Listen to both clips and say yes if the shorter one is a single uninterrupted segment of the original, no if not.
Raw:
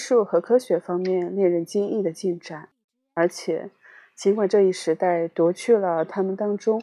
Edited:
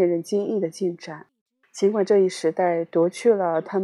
no